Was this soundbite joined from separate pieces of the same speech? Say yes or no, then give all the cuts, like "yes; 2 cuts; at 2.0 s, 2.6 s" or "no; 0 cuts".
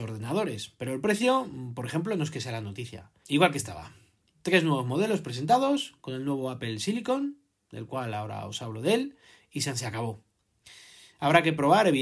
yes; 1 cut; at 3.2 s